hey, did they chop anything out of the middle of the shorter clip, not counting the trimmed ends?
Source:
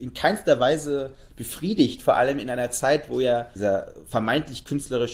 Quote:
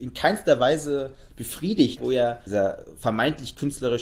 yes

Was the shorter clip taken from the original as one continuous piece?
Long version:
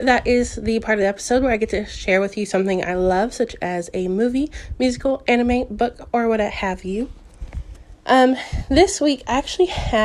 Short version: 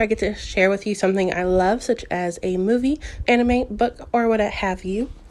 no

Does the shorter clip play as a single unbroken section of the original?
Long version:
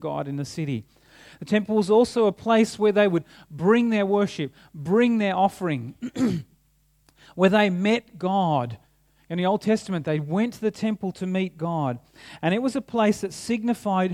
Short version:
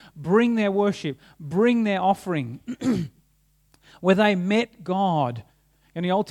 yes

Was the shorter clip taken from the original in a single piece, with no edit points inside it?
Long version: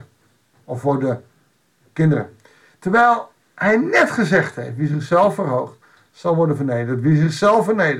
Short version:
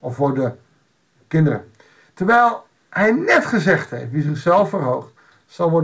yes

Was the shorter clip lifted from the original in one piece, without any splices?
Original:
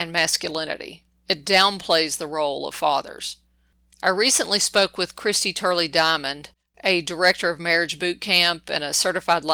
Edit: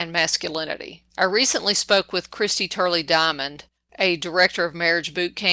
no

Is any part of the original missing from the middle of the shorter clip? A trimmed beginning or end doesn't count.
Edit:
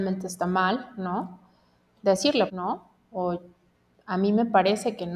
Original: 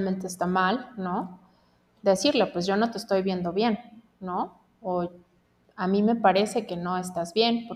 yes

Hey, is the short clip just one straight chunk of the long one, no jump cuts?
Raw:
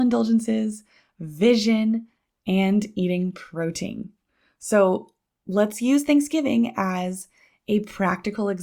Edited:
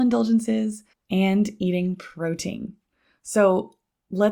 no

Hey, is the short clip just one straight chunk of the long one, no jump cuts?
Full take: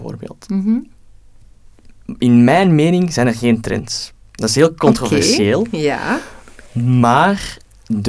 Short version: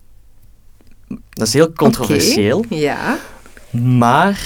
no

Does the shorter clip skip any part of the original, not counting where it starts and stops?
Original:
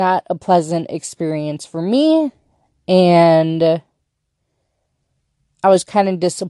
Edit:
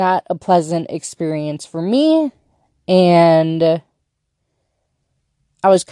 no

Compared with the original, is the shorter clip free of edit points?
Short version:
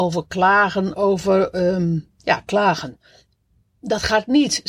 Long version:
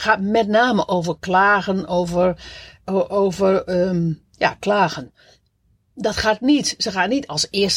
no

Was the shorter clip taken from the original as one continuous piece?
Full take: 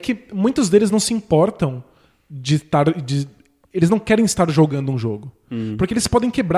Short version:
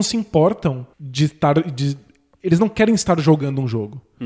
no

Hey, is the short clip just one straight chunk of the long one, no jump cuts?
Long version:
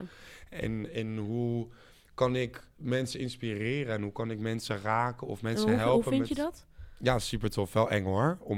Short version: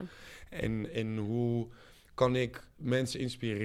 yes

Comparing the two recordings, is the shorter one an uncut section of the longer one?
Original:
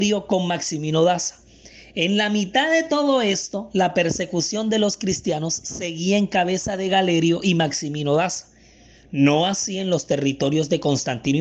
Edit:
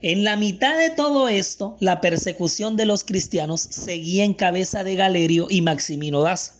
yes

